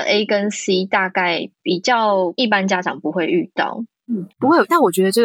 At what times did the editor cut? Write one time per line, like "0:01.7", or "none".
0:04.3